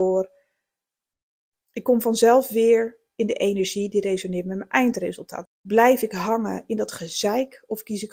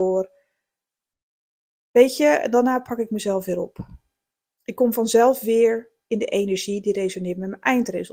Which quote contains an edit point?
first; 2 cuts; at 1.5 s, 5.5 s

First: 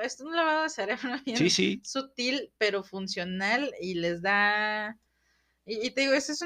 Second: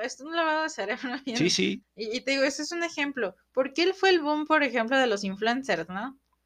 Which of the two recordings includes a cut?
second; 1 cut; at 1.8 s

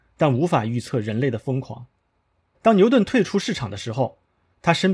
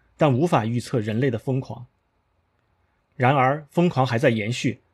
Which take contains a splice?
first; 1 cut; at 2.6 s

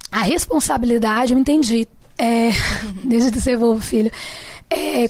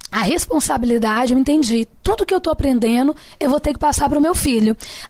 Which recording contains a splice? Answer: first; 1 cut; at 2.0 s

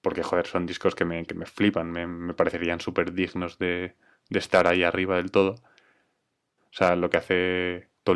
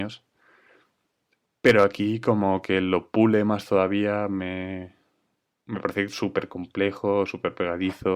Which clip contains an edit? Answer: first; 1 cut; at 6.6 s

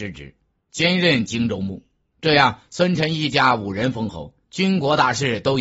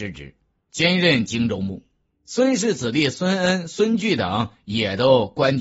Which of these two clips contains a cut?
first; 1 cut; at 2.1 s

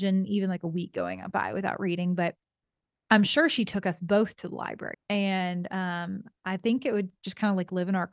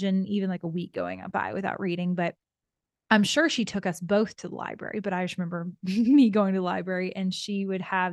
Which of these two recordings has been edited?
first; 1 cut; at 4.9 s

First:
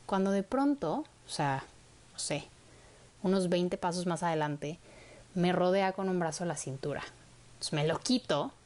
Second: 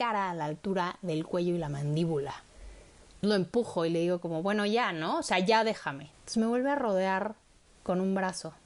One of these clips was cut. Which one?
second; 2 cuts; at 3.2 s, 6.1 s

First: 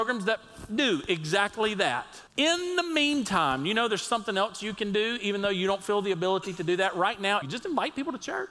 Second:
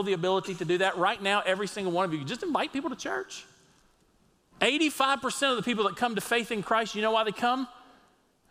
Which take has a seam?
first; 2 cuts; at 2.3 s, 7.4 s

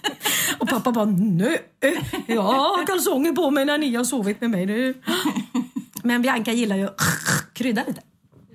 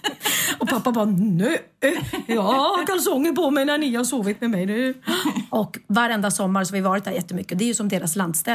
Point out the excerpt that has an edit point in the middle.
second; 2 cuts; at 5.5 s, 7.5 s

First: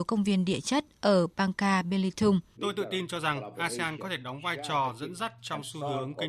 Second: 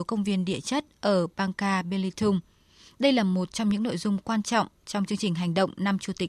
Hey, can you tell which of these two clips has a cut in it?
first; 1 cut; at 2.6 s

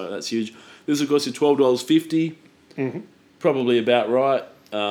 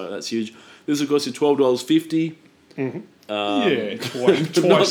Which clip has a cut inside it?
second; 1 cut; at 3.2 s

